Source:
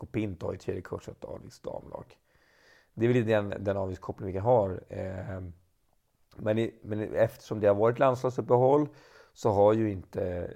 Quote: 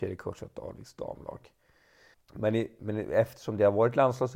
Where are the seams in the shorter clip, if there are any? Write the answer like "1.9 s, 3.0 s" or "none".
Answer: 2.1 s